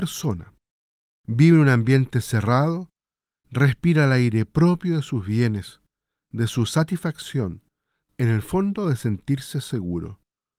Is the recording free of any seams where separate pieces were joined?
no; 1 cut; at 8.0 s

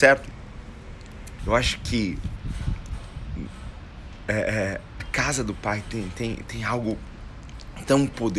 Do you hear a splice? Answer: yes; 2 cuts; at 1.4 s, 5.0 s

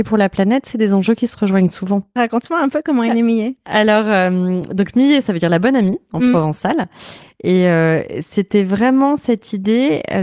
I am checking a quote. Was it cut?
no; 0 cuts

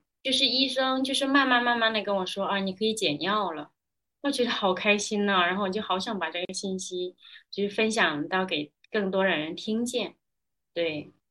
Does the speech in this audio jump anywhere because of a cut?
no; 0 cuts

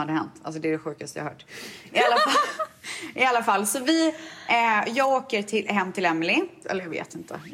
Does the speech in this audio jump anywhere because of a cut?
yes; 1 cut; at 6.6 s

